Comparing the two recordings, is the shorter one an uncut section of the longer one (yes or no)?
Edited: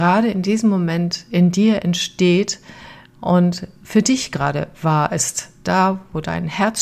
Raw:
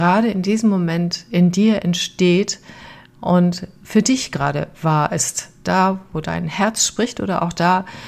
yes